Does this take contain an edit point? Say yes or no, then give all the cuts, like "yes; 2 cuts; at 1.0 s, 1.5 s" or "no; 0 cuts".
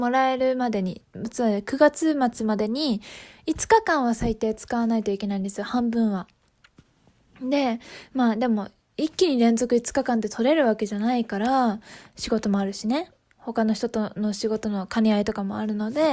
no; 0 cuts